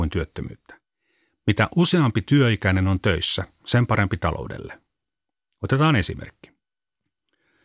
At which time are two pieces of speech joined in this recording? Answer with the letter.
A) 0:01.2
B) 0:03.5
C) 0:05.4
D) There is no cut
D